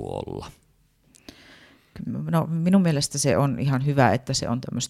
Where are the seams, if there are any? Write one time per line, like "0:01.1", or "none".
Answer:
none